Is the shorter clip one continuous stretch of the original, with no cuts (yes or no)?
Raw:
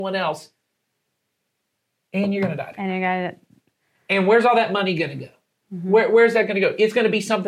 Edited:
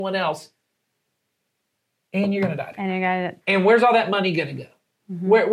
no